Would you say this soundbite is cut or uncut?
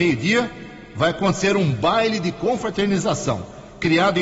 uncut